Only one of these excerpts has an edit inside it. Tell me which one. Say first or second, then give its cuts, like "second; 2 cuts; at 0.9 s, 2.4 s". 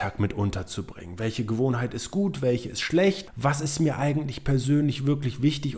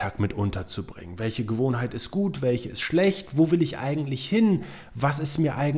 first; 1 cut; at 3.3 s